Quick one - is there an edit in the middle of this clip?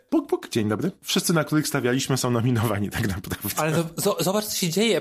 no; 0 cuts

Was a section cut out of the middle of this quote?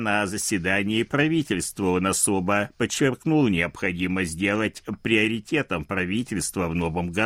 no; 0 cuts

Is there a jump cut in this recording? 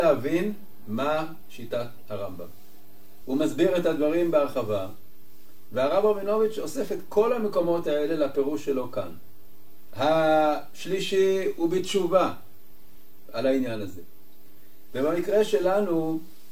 yes; 3 cuts; at 3.2 s, 9.9 s, 14.9 s

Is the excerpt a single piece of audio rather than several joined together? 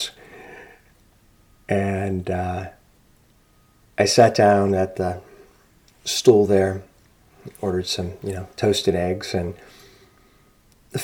yes; 0 cuts

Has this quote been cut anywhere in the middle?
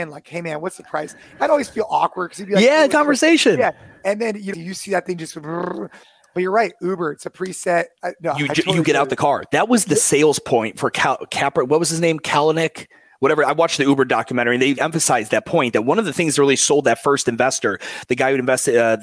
yes; 3 cuts; at 2.9 s, 4.5 s, 14.8 s

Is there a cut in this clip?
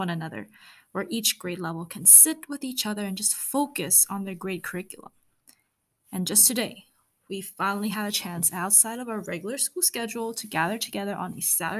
no; 0 cuts

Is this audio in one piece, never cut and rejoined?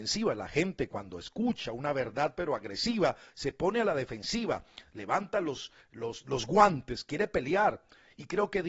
yes; 0 cuts

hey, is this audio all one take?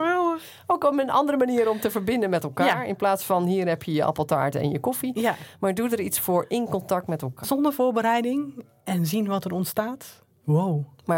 no; 1 cut; at 7.4 s

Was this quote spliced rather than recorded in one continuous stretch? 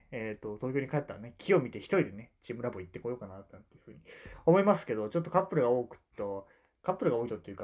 no; 0 cuts

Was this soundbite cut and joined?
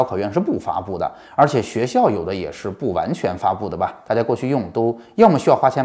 no; 0 cuts

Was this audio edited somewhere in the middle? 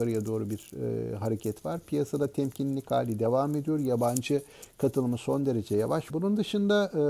yes; 1 cut; at 6.1 s

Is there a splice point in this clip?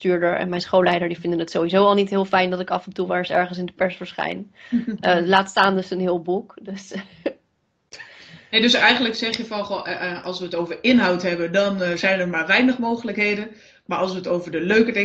no; 0 cuts

